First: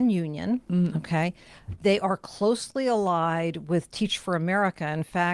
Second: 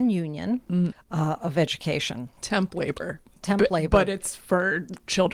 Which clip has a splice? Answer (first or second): second